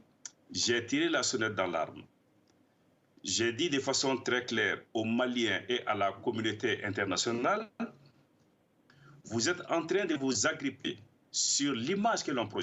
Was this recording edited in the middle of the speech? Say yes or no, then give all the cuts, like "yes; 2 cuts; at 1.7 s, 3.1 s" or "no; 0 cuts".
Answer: no; 0 cuts